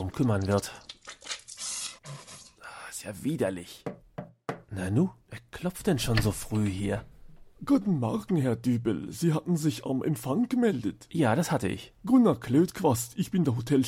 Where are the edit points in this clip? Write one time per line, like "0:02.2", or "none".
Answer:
0:02.0